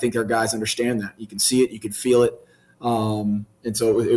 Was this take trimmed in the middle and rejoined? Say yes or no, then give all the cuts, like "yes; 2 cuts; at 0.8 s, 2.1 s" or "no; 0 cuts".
no; 0 cuts